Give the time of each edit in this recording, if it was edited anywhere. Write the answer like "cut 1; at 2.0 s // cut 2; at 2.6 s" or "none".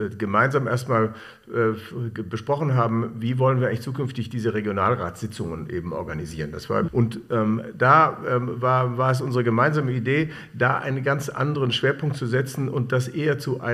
cut 1; at 6.9 s

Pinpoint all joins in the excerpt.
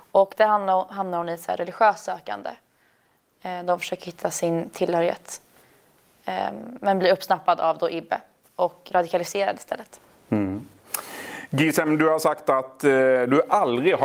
cut 1; at 8.9 s

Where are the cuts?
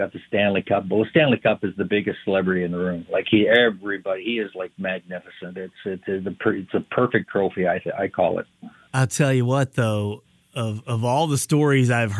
none

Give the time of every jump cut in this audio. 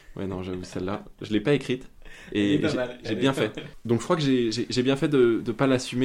none

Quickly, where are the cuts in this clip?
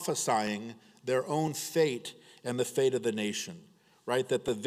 none

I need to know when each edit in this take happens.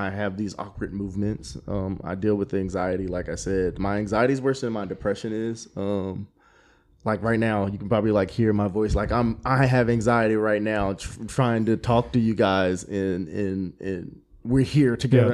none

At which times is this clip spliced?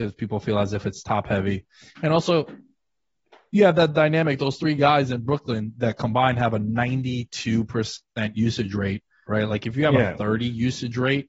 cut 1; at 9.3 s

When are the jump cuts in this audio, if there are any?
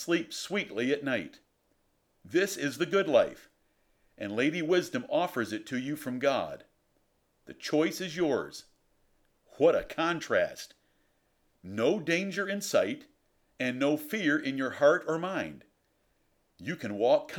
cut 1; at 9.4 s // cut 2; at 11.5 s

